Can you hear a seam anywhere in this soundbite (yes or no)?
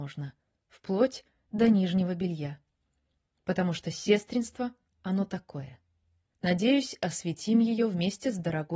yes